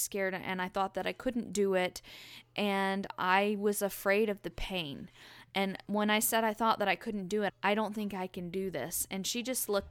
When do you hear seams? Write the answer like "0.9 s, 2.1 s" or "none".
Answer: 7.5 s

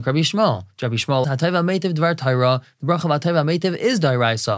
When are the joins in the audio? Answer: 1.2 s

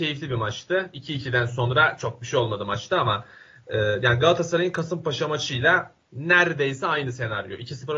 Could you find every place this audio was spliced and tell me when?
none

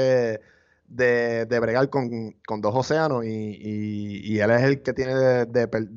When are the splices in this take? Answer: none

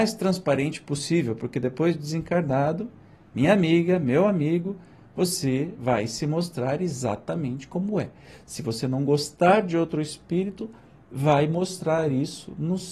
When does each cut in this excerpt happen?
none

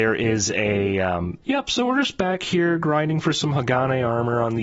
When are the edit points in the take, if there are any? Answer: 1.4 s

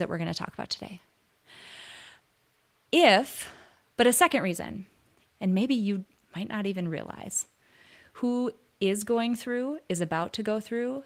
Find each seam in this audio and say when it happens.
5.3 s

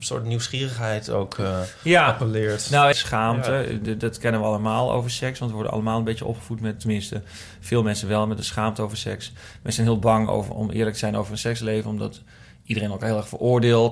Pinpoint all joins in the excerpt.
2.9 s, 6.8 s

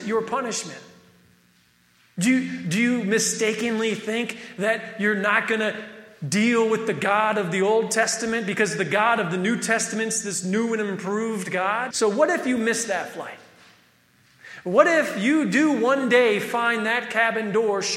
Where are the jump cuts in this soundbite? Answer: 11.9 s

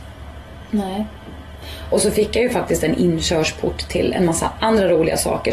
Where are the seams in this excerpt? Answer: 1.9 s

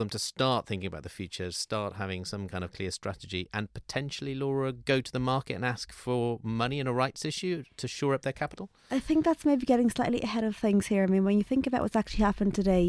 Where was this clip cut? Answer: none

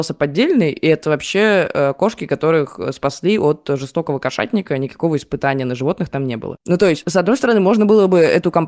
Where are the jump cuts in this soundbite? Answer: 6.6 s

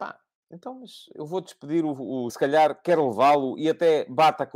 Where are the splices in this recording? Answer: 2.3 s

